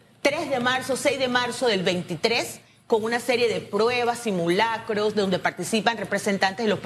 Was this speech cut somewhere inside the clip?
no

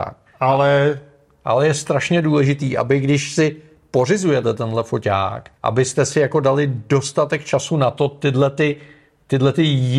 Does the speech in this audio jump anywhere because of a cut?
yes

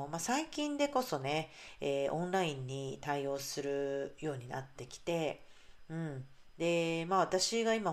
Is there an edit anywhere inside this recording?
no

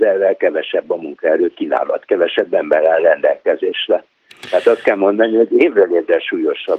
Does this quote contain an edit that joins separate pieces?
no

